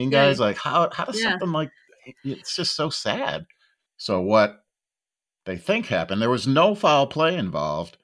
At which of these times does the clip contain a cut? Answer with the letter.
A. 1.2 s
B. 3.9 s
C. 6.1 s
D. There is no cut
B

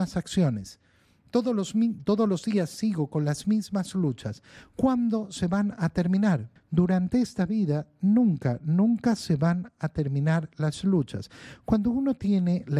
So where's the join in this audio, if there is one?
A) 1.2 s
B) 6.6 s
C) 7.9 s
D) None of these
B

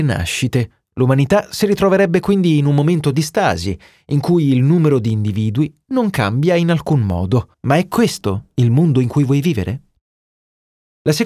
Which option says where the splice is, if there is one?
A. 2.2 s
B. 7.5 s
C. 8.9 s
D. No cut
B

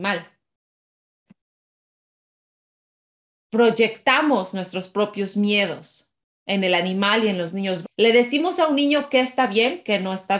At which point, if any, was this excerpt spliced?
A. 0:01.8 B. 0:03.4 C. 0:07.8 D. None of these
C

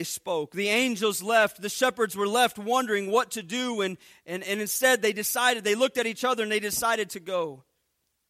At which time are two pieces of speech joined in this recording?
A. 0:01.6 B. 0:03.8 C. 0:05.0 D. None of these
D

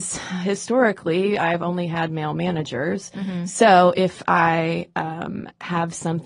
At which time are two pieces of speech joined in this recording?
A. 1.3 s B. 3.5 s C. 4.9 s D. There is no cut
D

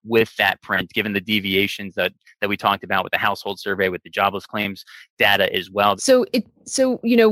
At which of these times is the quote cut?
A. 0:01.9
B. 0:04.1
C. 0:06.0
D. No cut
C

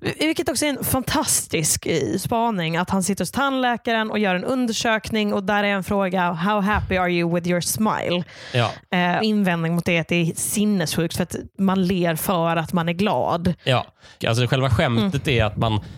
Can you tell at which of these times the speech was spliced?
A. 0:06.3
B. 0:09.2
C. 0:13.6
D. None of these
B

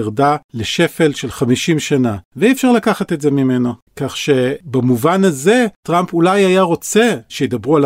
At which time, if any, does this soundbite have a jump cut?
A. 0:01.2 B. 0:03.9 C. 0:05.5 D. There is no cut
B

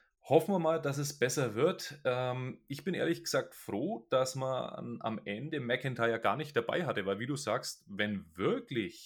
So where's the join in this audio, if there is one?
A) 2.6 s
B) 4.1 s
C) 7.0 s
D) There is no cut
D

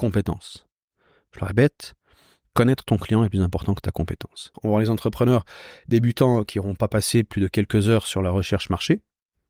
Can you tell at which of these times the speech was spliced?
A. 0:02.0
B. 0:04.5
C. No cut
B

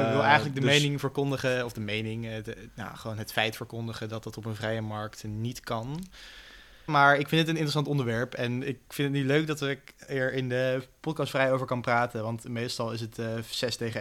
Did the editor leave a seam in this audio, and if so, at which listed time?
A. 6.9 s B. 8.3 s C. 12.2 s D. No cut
A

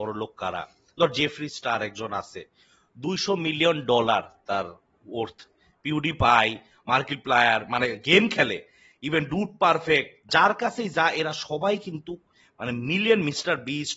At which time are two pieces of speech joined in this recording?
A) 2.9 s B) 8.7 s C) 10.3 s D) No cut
C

